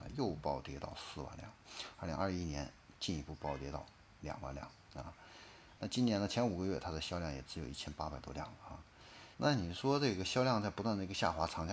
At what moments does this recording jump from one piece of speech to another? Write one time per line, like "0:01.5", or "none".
0:05.8
0:09.3